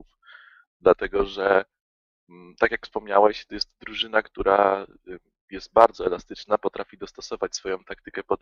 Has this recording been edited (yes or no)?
no